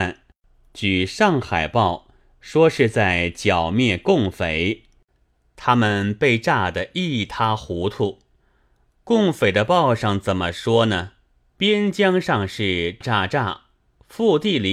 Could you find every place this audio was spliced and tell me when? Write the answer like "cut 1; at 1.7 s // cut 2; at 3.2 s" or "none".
cut 1; at 11.6 s // cut 2; at 13.0 s